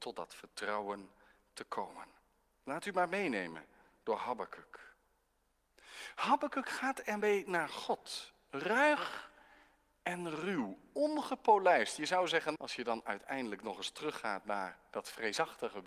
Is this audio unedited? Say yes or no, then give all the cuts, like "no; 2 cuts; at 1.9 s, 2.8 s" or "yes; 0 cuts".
no; 1 cut; at 12.6 s